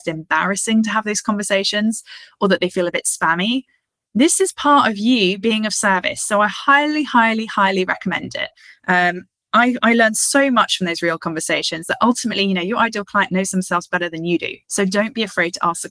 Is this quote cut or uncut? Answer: cut